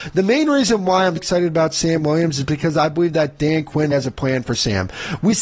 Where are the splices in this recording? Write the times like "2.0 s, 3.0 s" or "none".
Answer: 1.2 s, 3.9 s